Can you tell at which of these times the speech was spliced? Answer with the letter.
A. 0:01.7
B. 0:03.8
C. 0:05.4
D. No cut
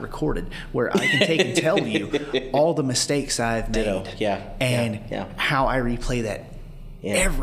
D